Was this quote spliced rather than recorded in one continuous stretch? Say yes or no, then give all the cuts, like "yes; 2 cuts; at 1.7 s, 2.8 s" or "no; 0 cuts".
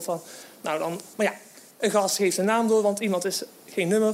yes; 1 cut; at 1.1 s